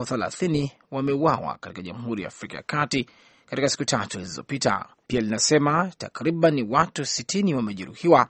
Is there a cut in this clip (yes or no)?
yes